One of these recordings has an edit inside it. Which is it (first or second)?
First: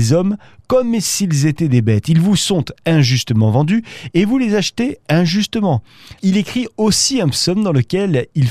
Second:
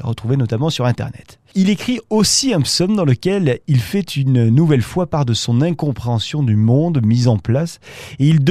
first